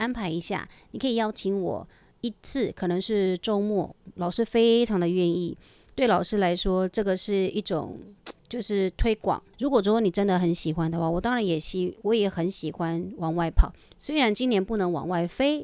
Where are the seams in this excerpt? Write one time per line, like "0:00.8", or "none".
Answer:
0:08.4
0:09.5